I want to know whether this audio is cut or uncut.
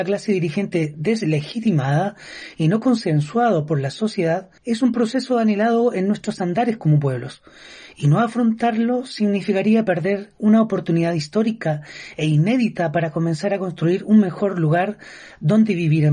cut